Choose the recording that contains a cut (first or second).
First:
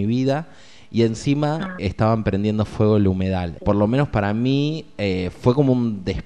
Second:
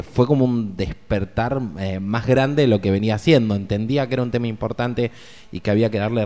first